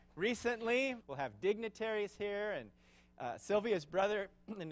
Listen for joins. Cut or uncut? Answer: cut